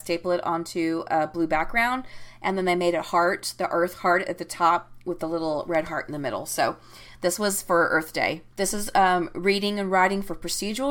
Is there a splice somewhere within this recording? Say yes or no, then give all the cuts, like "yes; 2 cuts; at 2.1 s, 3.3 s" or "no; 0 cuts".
yes; 1 cut; at 8.5 s